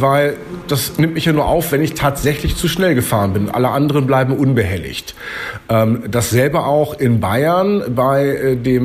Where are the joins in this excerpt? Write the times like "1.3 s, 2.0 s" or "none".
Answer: none